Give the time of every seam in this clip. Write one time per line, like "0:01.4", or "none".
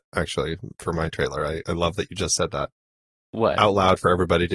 none